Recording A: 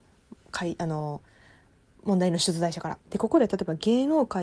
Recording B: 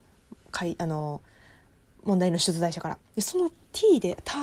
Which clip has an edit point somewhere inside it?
A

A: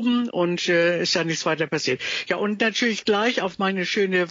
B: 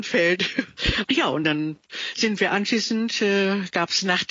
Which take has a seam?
B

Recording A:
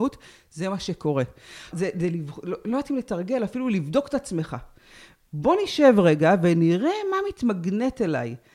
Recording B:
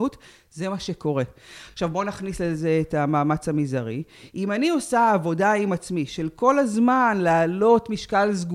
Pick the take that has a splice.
A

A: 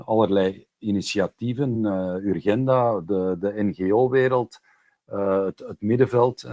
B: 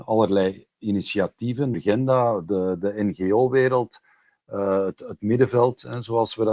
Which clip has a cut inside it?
B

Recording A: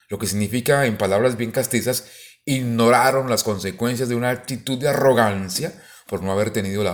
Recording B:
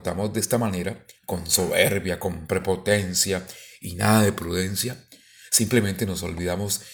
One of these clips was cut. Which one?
B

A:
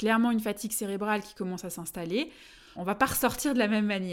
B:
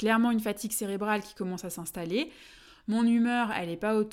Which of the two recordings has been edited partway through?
A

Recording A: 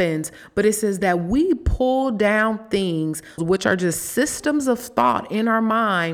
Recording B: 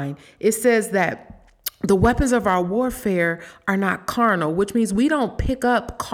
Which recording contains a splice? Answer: A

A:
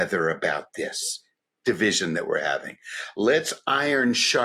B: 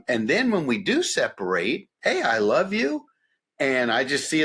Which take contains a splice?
B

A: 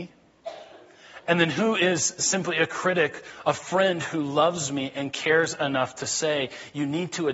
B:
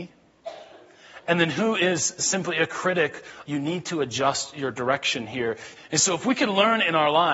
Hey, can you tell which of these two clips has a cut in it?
B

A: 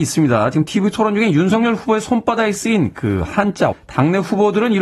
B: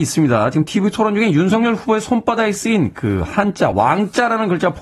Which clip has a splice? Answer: A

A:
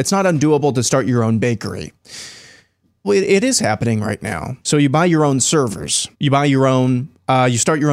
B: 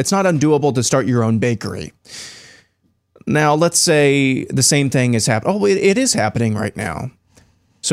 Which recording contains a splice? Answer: A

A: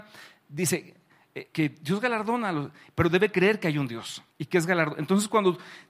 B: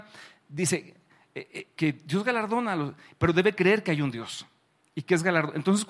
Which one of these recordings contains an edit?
A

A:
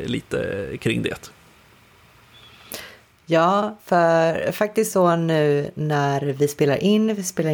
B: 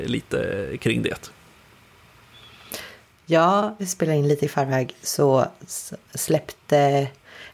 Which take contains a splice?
B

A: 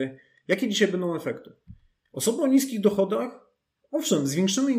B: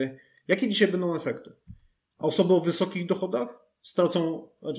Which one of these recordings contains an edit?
B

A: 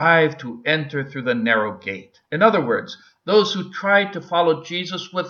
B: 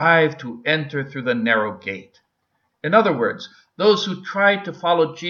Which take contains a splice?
A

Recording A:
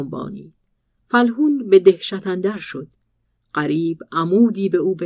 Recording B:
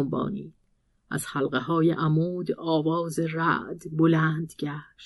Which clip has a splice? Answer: A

